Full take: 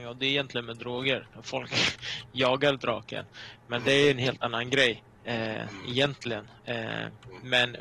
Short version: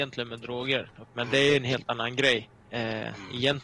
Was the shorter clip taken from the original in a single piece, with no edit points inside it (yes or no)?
no